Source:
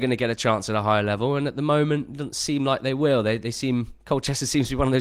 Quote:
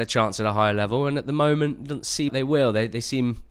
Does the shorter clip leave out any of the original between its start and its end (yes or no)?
yes